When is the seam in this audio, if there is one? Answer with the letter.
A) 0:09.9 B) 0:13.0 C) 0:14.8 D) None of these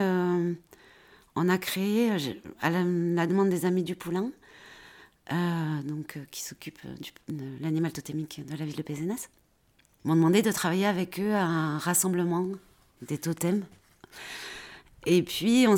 B